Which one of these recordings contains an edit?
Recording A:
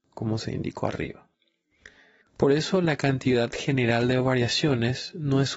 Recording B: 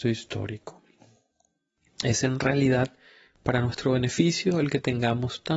A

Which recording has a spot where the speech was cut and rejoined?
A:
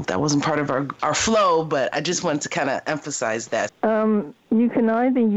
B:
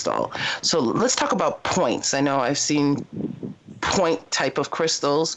A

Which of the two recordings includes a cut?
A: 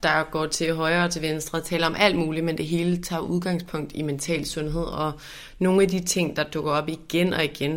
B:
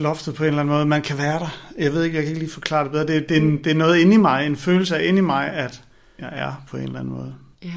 B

